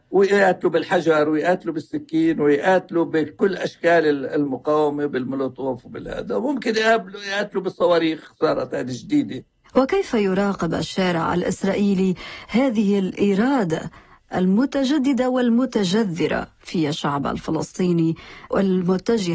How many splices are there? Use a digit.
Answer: 0